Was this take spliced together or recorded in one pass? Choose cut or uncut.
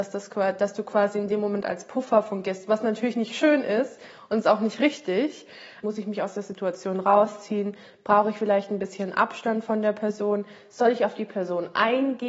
cut